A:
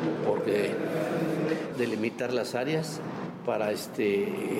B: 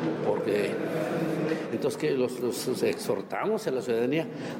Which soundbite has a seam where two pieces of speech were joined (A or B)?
A